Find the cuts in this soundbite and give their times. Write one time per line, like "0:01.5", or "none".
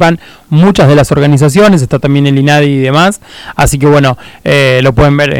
none